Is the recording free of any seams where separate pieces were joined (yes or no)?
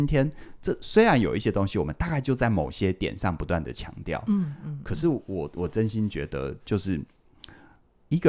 yes